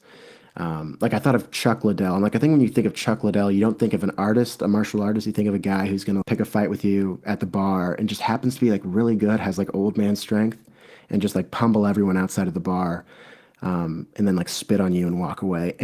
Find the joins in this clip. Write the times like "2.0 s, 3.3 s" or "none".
6.2 s